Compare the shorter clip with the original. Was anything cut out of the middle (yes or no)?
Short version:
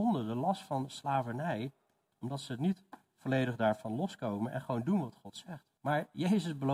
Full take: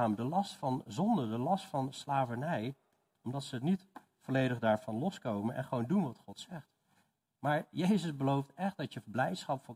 yes